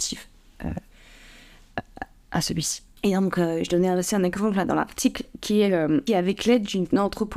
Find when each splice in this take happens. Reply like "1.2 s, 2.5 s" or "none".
6.1 s